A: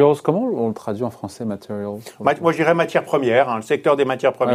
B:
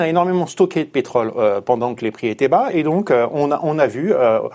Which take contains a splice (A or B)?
B